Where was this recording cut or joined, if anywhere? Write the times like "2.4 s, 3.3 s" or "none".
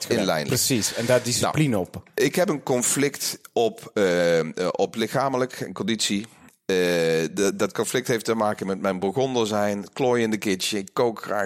none